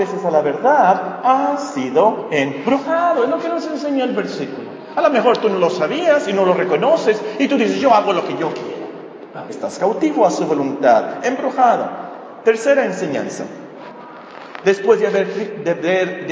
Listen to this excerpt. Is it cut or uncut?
cut